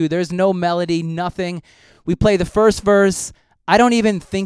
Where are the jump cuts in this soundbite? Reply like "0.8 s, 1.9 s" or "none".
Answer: none